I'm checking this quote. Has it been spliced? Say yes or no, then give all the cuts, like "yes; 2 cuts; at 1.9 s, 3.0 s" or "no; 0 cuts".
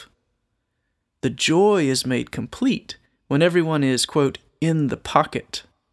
no; 0 cuts